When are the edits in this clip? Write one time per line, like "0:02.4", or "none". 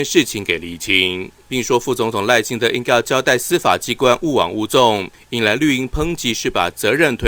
0:01.4